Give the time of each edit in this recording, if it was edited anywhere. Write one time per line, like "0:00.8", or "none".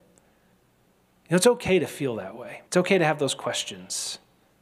0:02.7